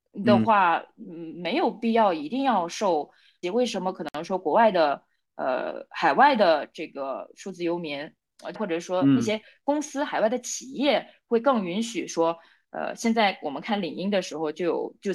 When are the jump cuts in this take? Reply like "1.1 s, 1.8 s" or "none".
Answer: 3.4 s, 8.5 s